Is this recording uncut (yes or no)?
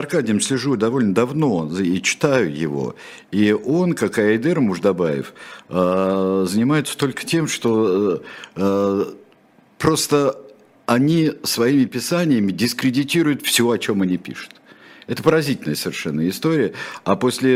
yes